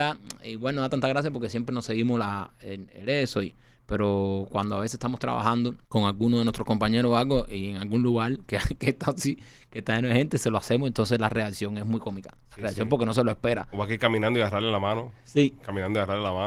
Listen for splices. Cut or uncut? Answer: cut